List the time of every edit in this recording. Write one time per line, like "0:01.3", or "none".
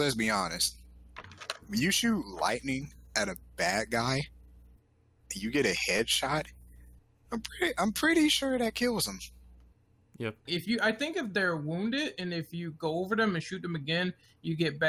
0:10.5